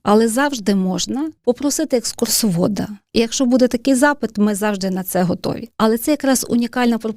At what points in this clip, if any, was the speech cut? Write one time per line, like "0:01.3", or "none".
0:03.1